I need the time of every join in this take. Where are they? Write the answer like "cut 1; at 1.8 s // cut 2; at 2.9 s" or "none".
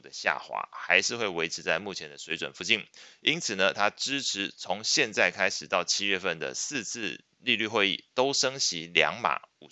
none